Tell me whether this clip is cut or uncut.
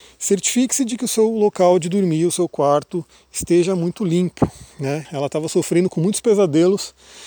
cut